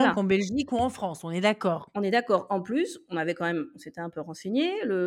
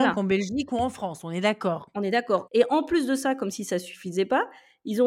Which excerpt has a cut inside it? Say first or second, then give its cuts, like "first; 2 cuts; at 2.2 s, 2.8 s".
second; 1 cut; at 2.5 s